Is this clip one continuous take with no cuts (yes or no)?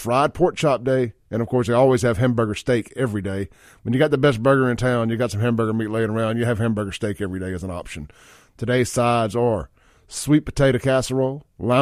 yes